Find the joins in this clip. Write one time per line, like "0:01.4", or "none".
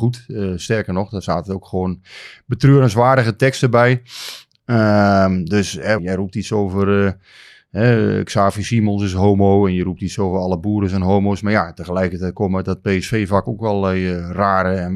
0:06.0